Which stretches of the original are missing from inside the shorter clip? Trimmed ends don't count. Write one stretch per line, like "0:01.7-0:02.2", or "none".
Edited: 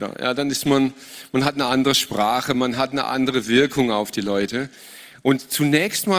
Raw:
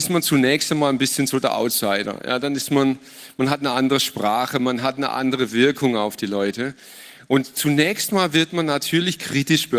none